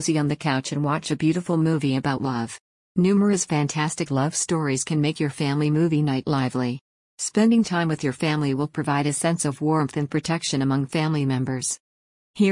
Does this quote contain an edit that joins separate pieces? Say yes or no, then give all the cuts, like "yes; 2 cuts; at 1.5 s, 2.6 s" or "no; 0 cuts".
no; 0 cuts